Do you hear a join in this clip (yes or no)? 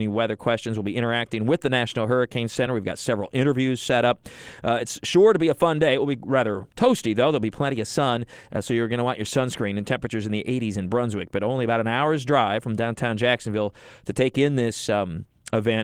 no